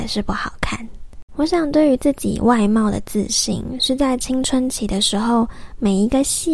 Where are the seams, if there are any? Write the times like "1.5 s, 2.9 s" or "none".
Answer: 1.3 s

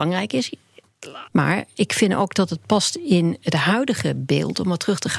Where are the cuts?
1.3 s

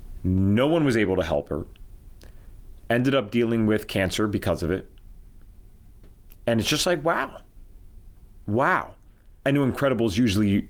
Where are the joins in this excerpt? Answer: 9.4 s

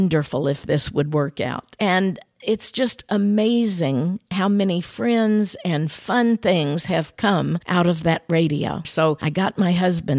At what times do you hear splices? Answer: 1.8 s, 8.8 s

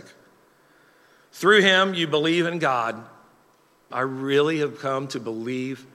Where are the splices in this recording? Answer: 3.9 s

